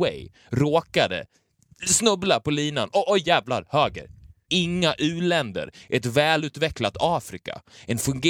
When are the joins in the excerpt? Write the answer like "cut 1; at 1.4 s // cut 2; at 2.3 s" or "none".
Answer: cut 1; at 4.5 s